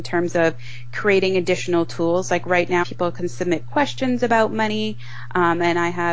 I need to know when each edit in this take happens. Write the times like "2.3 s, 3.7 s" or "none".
2.8 s